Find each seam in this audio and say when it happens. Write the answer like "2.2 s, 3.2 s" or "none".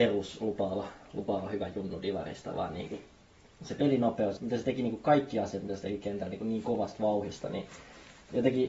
4.4 s